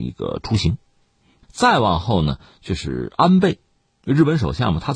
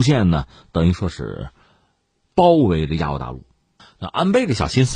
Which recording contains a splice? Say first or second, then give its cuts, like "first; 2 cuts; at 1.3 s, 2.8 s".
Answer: first; 1 cut; at 1.4 s